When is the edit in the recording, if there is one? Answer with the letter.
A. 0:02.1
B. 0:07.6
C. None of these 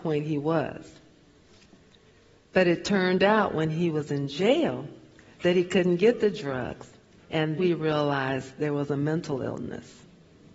B